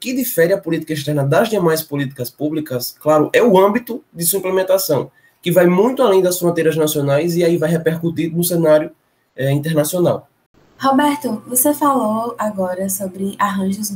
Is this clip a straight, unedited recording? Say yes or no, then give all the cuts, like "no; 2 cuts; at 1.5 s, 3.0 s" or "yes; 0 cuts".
yes; 0 cuts